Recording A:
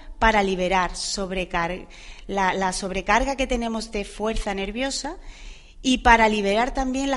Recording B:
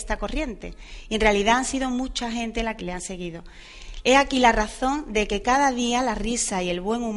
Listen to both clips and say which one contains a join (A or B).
B